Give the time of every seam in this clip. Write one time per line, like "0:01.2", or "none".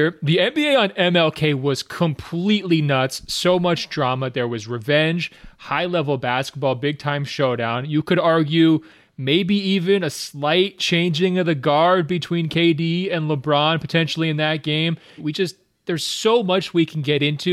0:15.2